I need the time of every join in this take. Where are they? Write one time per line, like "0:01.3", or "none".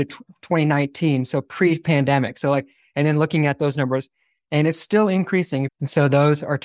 0:05.7